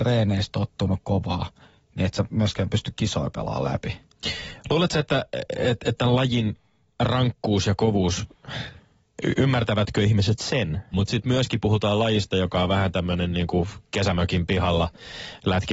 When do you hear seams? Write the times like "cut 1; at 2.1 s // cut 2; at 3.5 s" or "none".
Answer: cut 1; at 10.9 s